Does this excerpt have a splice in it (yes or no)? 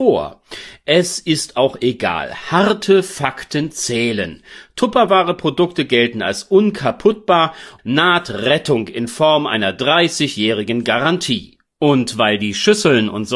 yes